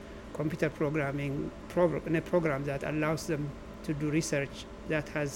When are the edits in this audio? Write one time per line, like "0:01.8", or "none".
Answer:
0:01.6